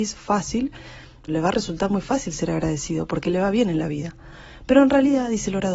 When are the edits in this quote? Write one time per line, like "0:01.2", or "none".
0:01.3